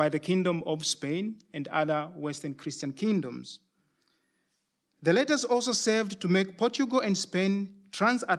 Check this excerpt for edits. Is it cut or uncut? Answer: uncut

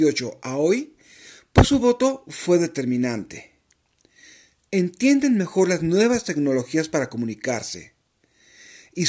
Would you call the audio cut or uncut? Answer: uncut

